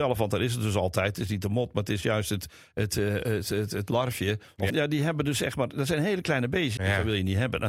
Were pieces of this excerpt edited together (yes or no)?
yes